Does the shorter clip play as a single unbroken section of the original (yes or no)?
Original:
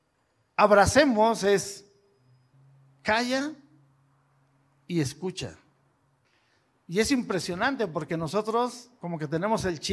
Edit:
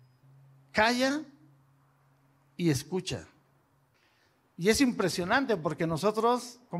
yes